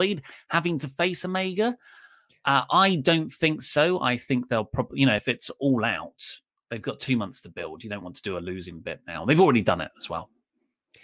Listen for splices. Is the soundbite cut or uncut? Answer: uncut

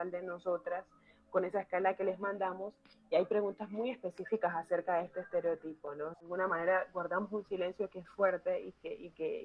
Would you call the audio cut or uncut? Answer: cut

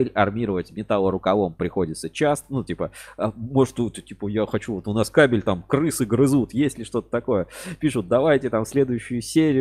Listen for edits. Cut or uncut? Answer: uncut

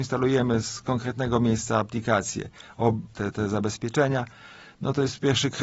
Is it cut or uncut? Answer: cut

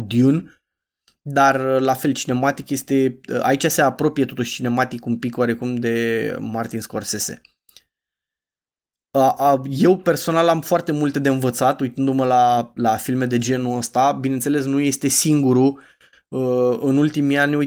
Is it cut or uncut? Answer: uncut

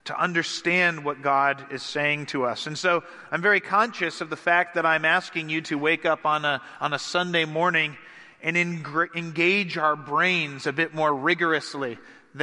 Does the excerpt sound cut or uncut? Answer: uncut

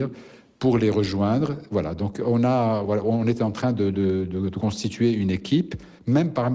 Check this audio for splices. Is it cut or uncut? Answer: uncut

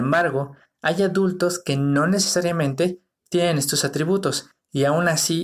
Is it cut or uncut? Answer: uncut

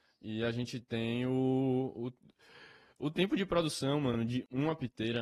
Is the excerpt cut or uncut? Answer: uncut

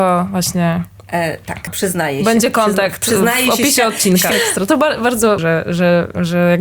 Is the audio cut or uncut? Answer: cut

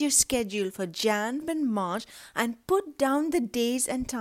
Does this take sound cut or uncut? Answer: cut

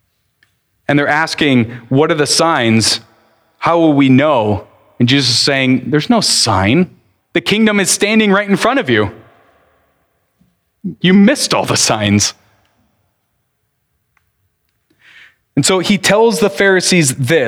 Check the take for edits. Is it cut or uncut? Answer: cut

